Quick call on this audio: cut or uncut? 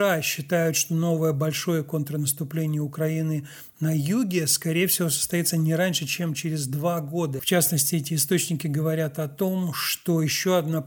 cut